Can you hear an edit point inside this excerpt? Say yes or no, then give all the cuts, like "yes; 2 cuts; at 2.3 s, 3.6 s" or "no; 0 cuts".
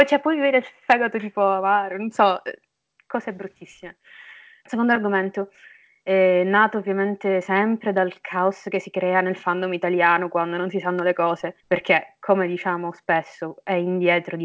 yes; 2 cuts; at 4.6 s, 11.6 s